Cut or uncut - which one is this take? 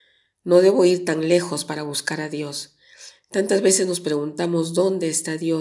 uncut